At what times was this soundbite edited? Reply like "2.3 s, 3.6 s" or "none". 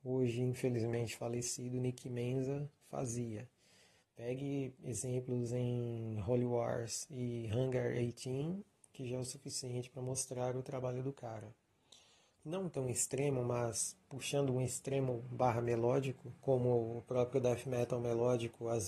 4.0 s, 12.4 s, 16.4 s